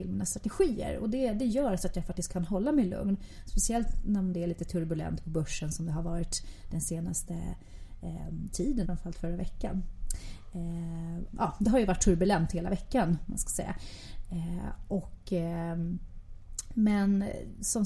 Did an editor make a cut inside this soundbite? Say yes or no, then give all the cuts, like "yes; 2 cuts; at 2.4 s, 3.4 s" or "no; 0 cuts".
yes; 2 cuts; at 8.8 s, 11.3 s